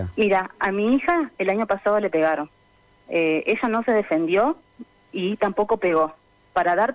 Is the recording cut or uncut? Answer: uncut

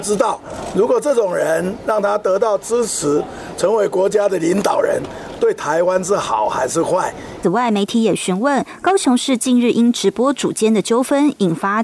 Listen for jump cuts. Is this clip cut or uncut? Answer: cut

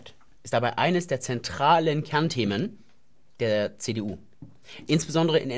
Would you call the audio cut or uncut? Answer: uncut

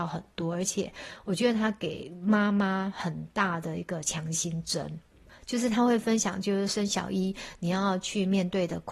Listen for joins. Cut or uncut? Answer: uncut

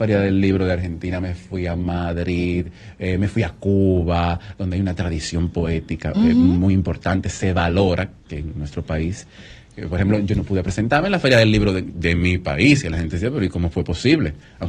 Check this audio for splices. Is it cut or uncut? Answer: uncut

